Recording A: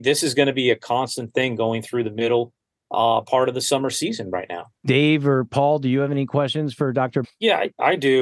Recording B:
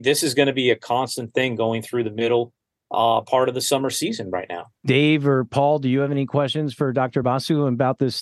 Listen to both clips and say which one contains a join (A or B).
A